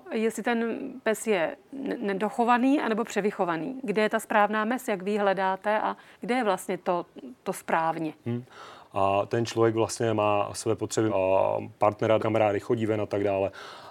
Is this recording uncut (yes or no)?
no